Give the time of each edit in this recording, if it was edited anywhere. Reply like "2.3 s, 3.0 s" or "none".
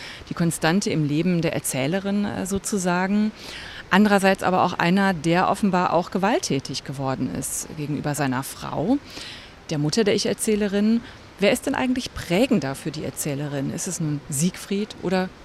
none

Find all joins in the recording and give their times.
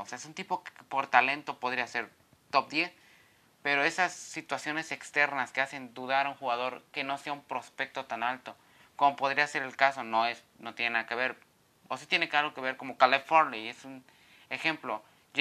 none

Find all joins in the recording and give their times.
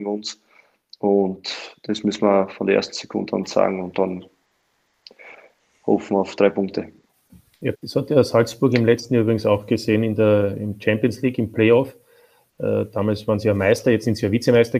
7.7 s

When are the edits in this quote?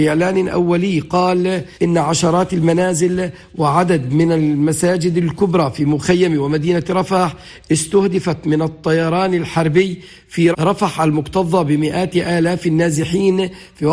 1.7 s, 10.5 s

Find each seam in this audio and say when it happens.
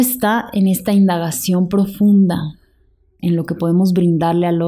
3.2 s

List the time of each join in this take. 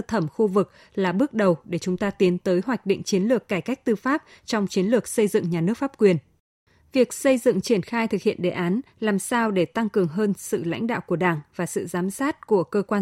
none

